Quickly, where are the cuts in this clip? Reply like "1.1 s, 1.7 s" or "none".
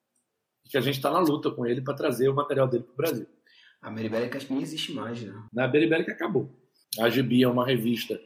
5.5 s, 6.8 s